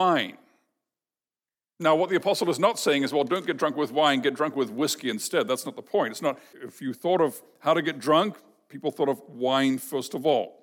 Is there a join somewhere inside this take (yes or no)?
yes